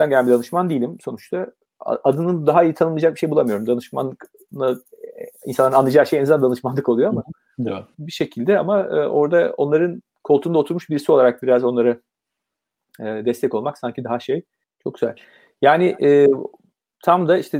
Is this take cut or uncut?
cut